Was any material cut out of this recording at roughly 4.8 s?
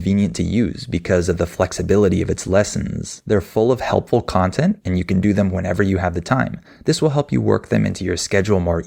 yes; 1 cut; at 4.8 s

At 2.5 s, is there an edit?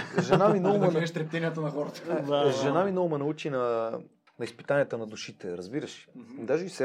no; 1 cut; at 4.3 s

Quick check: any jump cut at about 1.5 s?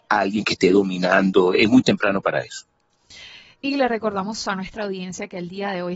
no; 0 cuts

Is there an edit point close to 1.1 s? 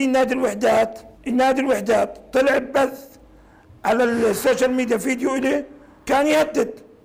yes; 1 cut; at 1.1 s

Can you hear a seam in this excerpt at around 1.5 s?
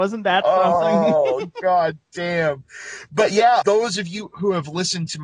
no; 1 cut; at 3.6 s

